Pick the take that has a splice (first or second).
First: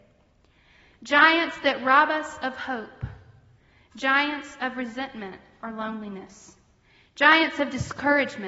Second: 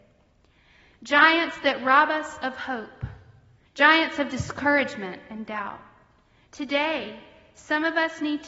second